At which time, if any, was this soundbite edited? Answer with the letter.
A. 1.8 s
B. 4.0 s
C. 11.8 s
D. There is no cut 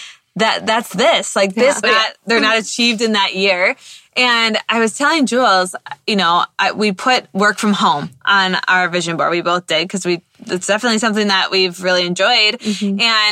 A